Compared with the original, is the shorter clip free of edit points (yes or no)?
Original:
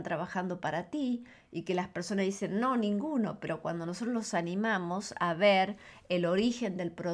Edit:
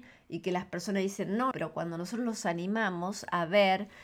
no